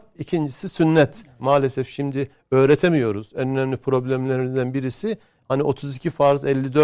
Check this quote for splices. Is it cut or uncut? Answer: cut